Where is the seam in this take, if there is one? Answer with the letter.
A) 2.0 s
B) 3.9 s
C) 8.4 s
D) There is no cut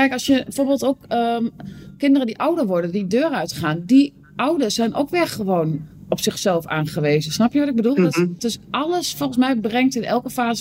C